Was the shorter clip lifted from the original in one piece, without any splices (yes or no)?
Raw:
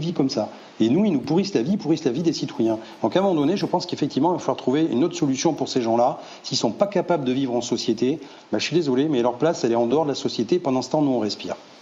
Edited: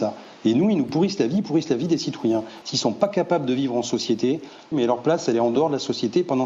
no